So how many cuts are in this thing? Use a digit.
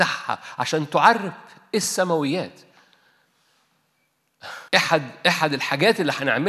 1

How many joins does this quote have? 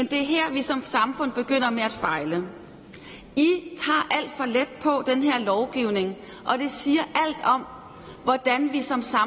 0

